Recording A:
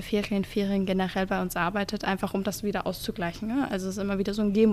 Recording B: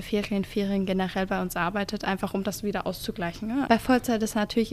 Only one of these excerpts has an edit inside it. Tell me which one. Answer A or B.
B